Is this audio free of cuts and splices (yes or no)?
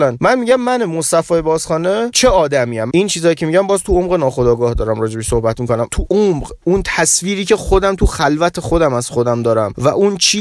no